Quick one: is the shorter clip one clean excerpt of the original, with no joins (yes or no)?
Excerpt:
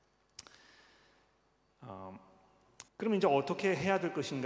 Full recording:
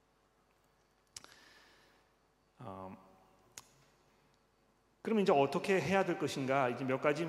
no